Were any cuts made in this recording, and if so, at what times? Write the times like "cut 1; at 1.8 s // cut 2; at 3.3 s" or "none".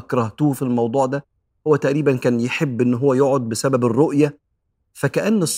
none